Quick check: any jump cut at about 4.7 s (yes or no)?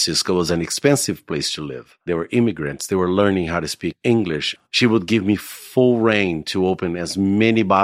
yes